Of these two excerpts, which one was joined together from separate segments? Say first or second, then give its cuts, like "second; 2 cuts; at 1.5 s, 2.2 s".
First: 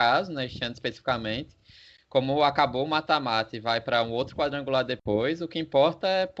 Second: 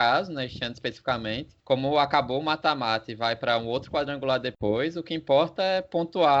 second; 1 cut; at 1.6 s